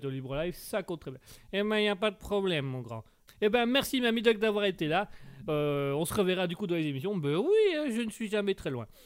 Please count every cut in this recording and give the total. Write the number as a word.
one